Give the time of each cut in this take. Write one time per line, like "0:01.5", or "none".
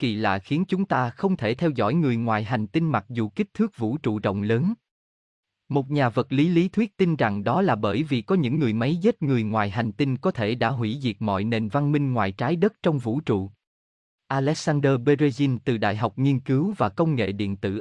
none